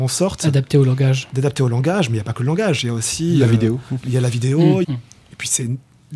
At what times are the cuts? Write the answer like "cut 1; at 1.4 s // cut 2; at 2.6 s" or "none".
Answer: cut 1; at 4.8 s